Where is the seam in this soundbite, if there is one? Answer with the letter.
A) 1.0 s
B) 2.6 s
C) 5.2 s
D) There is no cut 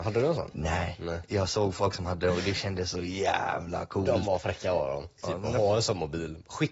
C